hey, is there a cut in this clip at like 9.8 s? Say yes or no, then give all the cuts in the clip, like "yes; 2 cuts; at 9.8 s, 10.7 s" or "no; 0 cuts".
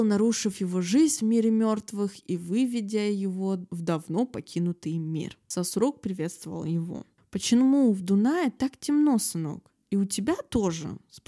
no; 0 cuts